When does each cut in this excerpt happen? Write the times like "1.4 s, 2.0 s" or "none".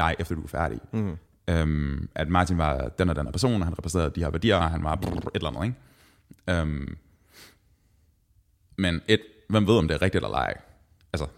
4.6 s